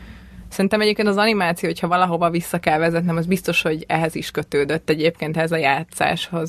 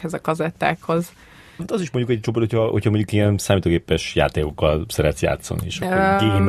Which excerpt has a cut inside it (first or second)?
second